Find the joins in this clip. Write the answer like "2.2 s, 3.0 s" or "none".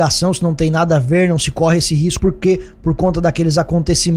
2.2 s